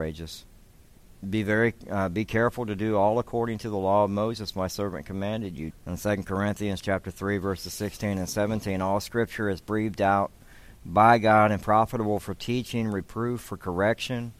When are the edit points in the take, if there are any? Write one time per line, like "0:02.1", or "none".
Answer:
0:05.7